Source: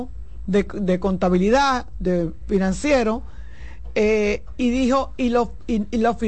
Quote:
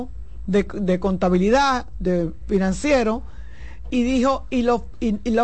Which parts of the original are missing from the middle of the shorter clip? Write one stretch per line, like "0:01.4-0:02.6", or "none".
0:03.9-0:04.6